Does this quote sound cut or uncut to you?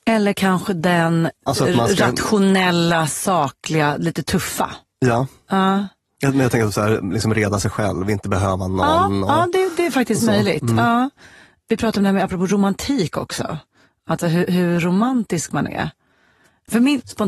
uncut